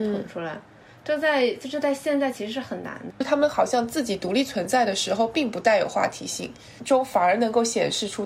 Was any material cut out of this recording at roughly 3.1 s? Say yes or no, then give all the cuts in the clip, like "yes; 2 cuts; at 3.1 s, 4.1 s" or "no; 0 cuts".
yes; 2 cuts; at 3.1 s, 6.8 s